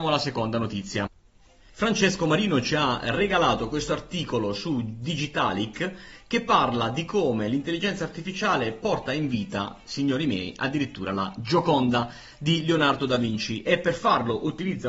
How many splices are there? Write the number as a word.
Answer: one